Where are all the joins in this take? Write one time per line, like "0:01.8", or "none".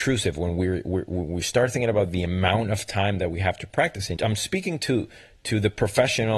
0:04.2

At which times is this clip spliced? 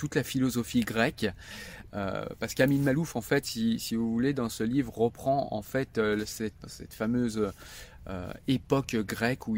0:06.6

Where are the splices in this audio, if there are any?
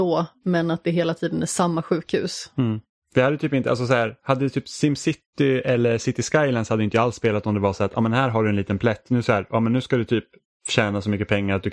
none

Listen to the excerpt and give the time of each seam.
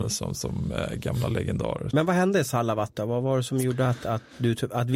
0:01.9

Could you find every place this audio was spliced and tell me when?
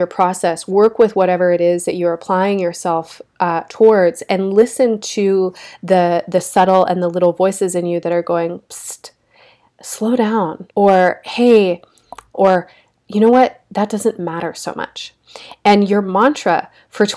0:10.7
0:12.3

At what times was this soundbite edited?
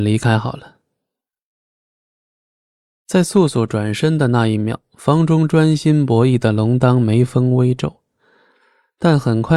none

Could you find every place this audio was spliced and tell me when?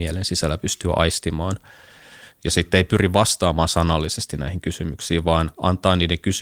0:02.3

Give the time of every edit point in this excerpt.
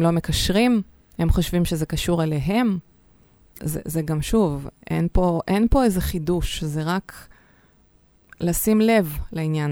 0:03.6

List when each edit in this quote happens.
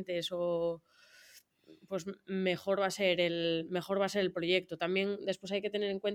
none

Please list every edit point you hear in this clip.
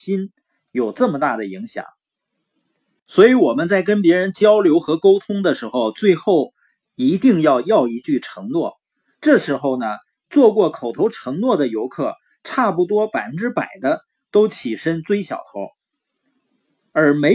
0:09.1

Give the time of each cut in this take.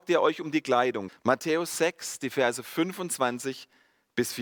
0:01.1

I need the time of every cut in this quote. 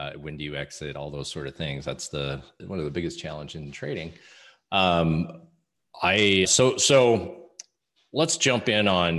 0:02.6
0:06.4

